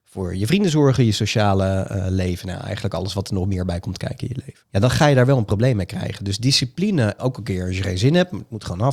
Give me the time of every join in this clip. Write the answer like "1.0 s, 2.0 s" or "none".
4.6 s, 7.2 s